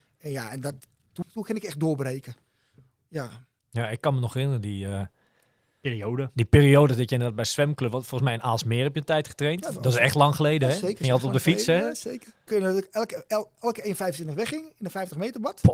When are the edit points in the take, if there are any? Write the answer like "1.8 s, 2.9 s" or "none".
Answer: 1.2 s, 12.5 s

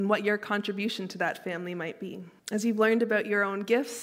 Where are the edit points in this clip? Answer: 2.4 s

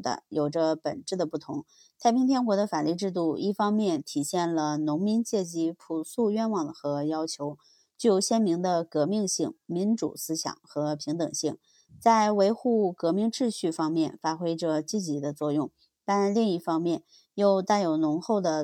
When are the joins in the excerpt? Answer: none

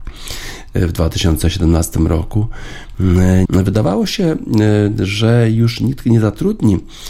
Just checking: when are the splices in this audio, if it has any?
3.5 s

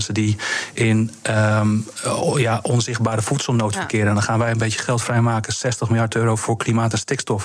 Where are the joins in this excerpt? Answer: none

